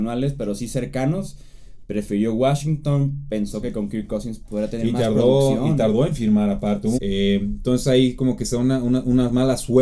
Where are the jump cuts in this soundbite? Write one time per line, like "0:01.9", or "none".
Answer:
0:06.9